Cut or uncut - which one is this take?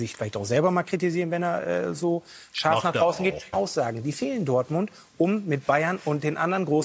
cut